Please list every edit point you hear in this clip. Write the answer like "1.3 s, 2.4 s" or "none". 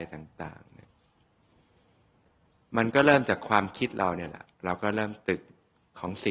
none